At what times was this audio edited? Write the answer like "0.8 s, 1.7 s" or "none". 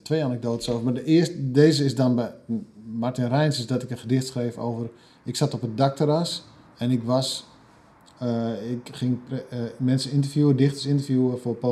none

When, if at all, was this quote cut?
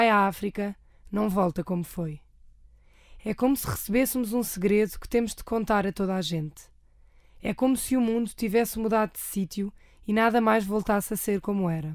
none

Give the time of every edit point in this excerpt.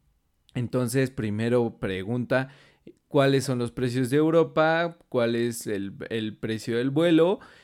none

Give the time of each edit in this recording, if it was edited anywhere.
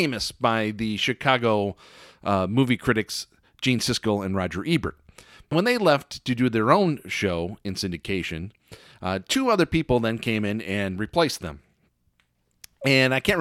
5.5 s

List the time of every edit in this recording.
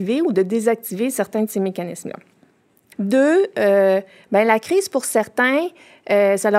2.9 s

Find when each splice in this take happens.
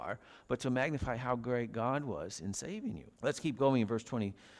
3.2 s

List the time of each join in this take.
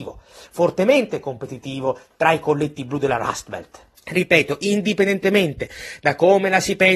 3.9 s

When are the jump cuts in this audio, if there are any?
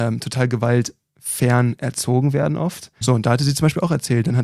3.0 s

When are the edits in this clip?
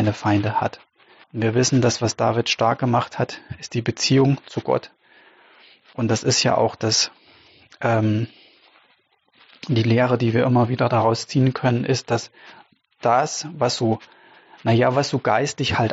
1.2 s

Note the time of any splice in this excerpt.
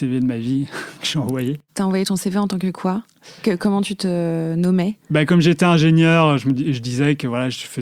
none

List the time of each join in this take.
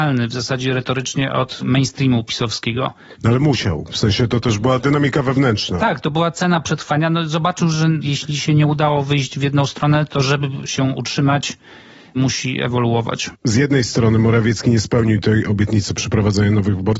none

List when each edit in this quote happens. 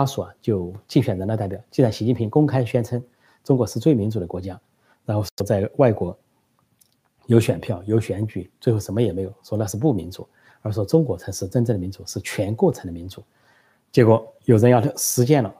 none

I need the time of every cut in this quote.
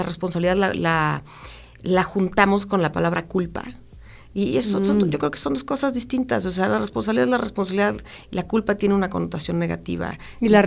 none

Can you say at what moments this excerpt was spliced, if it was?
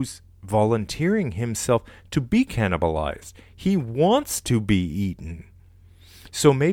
none

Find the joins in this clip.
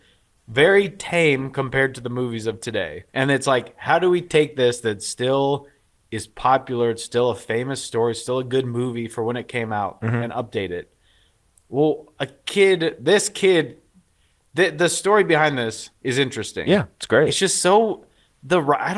3.1 s

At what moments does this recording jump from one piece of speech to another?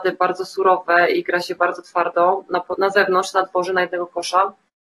2.8 s

